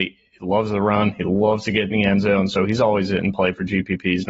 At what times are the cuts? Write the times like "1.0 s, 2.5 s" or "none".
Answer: none